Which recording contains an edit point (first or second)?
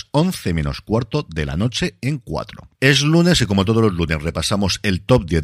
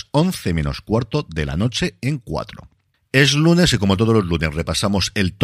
first